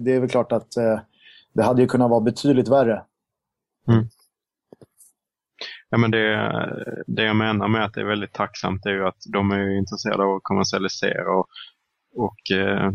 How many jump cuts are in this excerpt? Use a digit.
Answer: 0